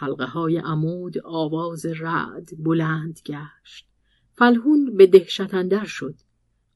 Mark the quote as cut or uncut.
uncut